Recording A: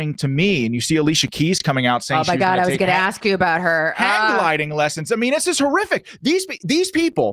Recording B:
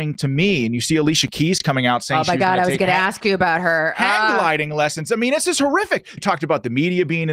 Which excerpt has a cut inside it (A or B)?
B